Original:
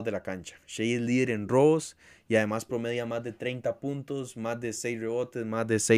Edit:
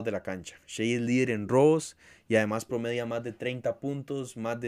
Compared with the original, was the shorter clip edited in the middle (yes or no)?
no